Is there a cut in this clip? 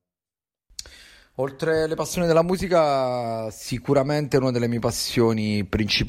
no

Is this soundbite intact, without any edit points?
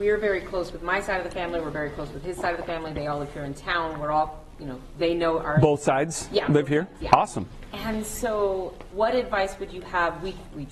no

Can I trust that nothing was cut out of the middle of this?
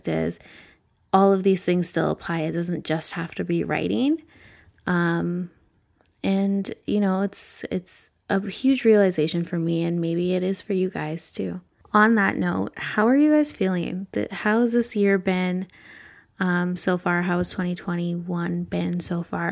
yes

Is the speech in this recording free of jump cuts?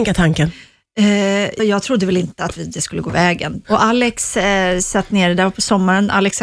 no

